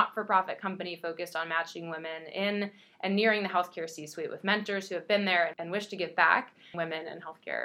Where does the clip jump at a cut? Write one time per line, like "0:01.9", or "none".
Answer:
0:06.7